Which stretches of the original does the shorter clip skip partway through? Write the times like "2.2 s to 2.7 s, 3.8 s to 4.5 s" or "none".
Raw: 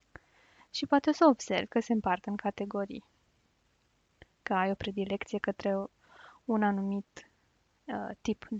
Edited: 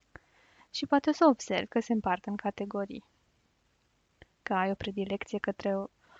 none